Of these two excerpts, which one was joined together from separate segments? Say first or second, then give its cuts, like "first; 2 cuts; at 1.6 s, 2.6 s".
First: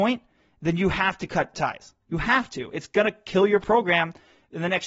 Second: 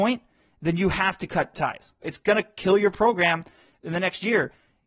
second; 1 cut; at 2.0 s